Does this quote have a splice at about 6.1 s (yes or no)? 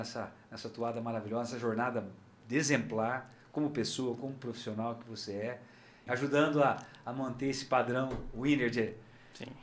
yes